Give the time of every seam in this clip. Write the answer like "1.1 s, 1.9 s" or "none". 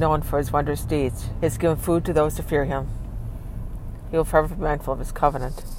1.4 s